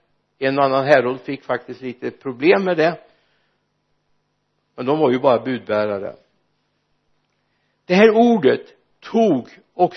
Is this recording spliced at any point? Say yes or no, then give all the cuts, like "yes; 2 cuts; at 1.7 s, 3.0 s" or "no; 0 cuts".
no; 0 cuts